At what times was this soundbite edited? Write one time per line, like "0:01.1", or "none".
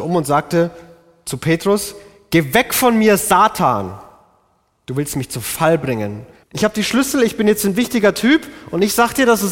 0:06.4